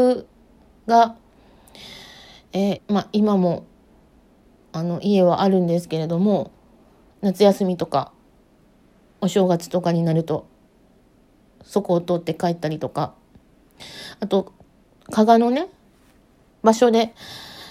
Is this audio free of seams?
no; 2 cuts; at 2.8 s, 7.1 s

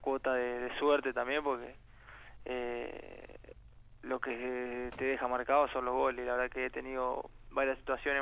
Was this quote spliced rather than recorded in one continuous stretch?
no; 0 cuts

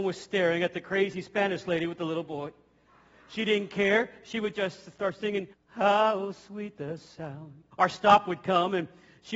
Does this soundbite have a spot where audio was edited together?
yes; 2 cuts; at 5.5 s, 7.7 s

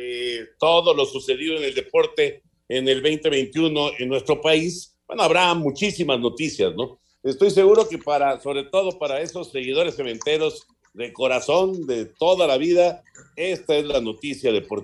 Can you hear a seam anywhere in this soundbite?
yes; 1 cut; at 7.2 s

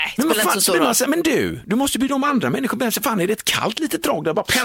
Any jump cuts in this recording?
no; 0 cuts

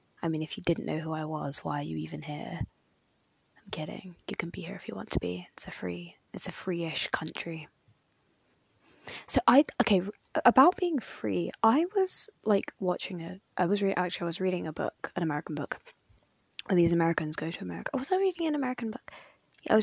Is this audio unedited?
yes; 0 cuts

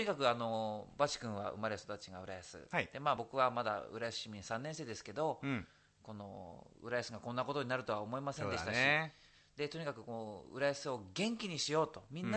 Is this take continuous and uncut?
yes; 0 cuts

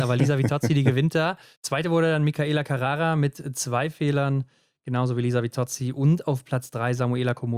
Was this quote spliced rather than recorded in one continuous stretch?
no; 0 cuts

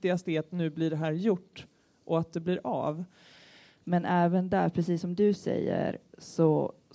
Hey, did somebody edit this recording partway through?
yes; 1 cut; at 3.8 s

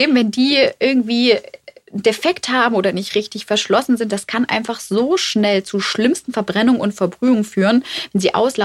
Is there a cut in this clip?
no; 0 cuts

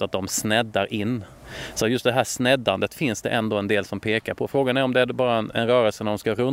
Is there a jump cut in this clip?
no; 0 cuts

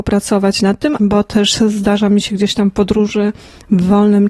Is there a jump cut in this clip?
yes; 1 cut; at 1.0 s

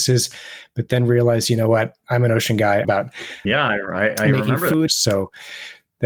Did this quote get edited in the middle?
yes; 2 cuts; at 2.8 s, 4.9 s

